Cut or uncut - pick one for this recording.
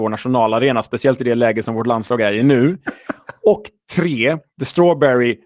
cut